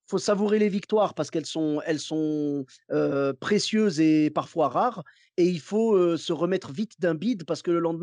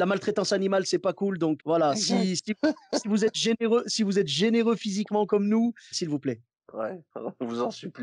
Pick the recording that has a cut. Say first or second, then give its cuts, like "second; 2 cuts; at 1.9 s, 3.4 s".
second; 3 cuts; at 1.6 s, 5.9 s, 7.1 s